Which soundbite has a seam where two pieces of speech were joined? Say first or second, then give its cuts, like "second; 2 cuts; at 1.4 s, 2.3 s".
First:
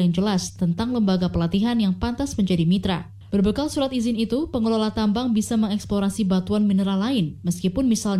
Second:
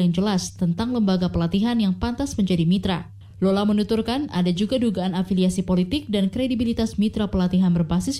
first; 1 cut; at 3.3 s